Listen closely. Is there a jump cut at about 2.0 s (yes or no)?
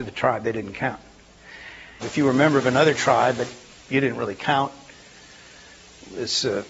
yes